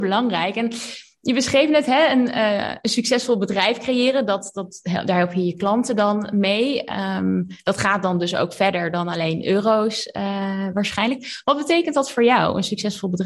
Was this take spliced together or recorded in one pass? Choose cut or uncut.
uncut